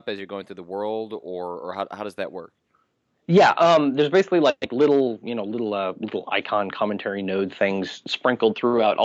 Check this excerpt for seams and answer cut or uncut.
uncut